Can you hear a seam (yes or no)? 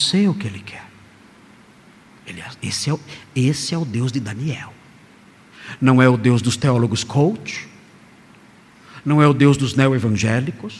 no